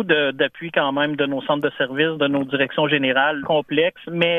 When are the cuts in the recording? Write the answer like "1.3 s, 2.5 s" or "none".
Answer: 3.4 s